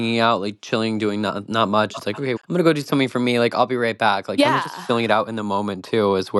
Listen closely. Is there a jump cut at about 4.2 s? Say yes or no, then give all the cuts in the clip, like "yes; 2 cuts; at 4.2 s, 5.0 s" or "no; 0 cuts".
no; 1 cut; at 2.4 s